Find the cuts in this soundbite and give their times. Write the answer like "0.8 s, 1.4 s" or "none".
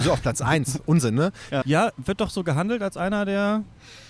1.6 s

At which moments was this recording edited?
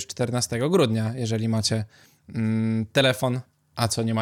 none

